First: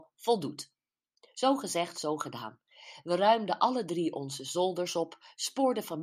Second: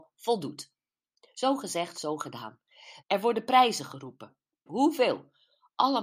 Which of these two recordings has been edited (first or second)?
second